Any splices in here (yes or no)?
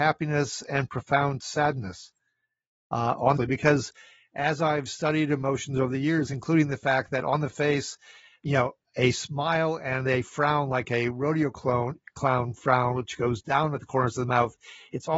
yes